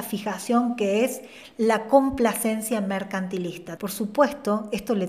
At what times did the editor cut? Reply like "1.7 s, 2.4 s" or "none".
3.8 s